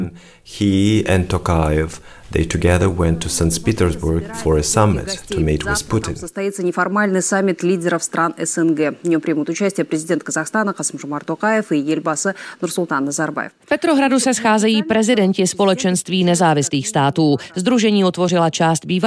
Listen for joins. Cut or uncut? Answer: uncut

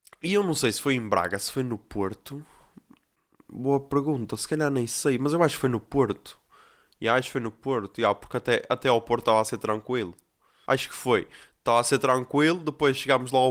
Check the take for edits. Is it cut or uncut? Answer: cut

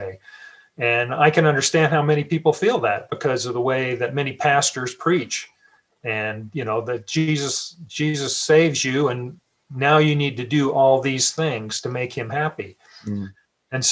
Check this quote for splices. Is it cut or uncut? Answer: uncut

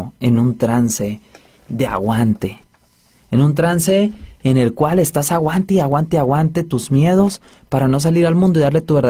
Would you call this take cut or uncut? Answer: uncut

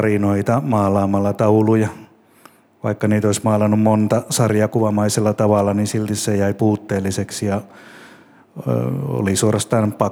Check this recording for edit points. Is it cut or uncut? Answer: uncut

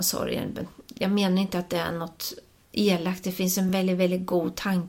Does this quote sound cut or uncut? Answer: uncut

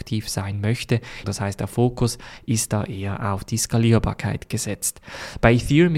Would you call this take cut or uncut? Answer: cut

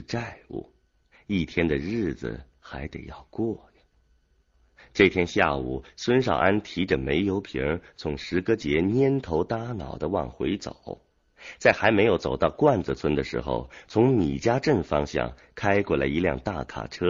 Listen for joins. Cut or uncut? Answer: uncut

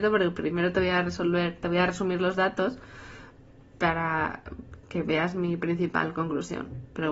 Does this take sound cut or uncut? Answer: uncut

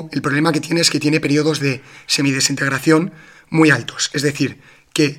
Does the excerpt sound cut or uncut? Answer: uncut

